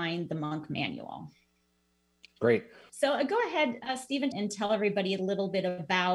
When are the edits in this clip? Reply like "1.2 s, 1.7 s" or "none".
2.9 s, 4.3 s